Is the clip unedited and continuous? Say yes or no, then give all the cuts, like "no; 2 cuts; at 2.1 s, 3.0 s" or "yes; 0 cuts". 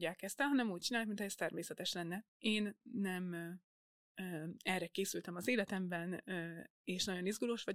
no; 1 cut; at 2.3 s